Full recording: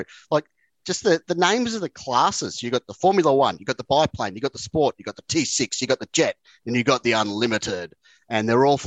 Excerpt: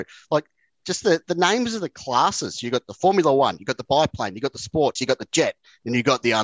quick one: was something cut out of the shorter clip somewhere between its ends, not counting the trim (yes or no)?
yes